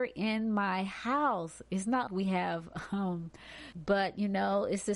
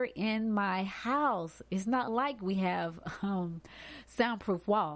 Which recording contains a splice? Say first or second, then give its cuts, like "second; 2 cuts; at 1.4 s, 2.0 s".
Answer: first; 2 cuts; at 2.1 s, 3.7 s